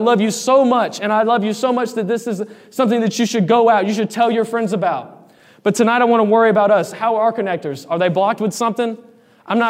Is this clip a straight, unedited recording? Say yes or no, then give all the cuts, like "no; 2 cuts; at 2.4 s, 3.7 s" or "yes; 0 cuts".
yes; 0 cuts